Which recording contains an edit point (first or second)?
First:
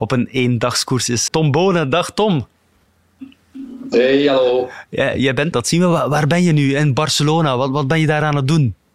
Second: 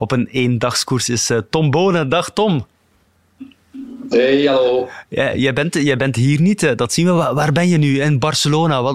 first